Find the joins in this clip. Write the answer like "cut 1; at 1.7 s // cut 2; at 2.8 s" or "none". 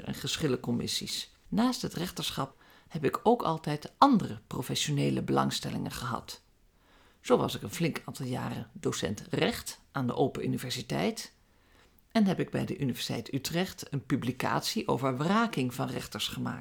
cut 1; at 1.5 s

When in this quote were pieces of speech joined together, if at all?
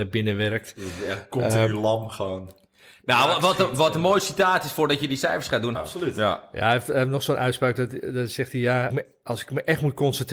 cut 1; at 5.7 s // cut 2; at 8.9 s

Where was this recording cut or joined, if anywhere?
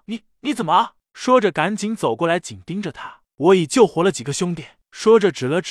none

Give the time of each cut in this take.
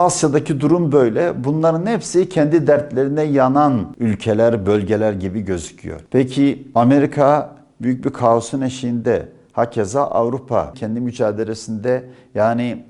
cut 1; at 10.7 s

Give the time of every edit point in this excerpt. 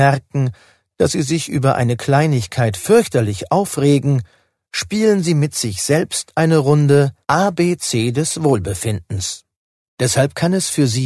cut 1; at 7.2 s // cut 2; at 9.9 s

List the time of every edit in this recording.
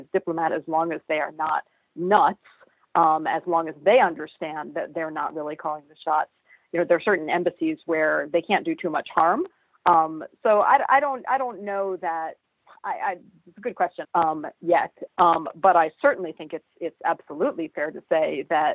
cut 1; at 14.0 s // cut 2; at 15.1 s

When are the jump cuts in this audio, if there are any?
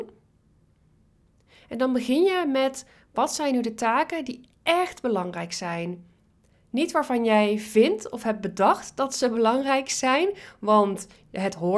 none

